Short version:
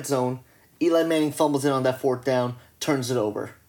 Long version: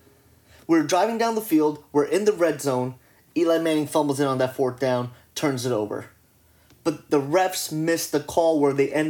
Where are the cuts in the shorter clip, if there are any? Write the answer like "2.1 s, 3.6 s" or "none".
none